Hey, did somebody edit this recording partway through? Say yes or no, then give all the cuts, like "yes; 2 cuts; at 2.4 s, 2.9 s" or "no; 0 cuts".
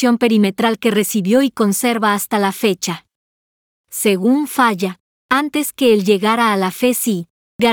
yes; 1 cut; at 3.8 s